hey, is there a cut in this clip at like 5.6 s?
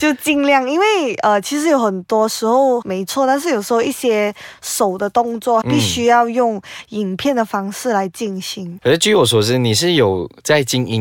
yes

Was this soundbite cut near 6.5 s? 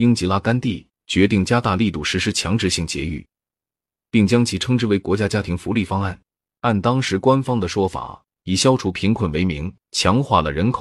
yes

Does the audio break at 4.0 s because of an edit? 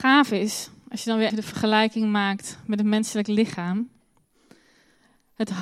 no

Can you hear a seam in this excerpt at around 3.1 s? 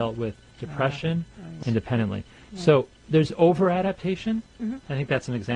no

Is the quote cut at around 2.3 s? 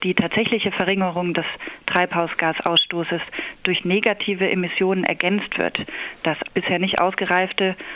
no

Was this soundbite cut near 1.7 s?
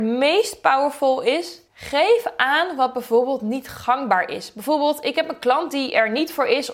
yes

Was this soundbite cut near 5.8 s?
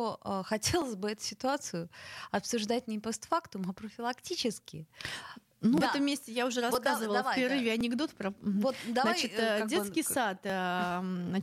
yes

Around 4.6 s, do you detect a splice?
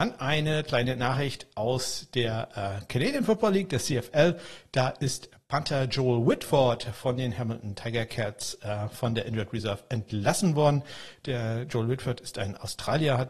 no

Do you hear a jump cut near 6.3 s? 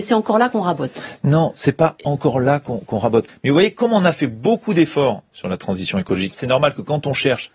yes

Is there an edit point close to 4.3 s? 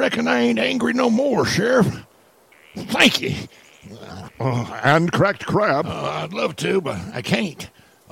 yes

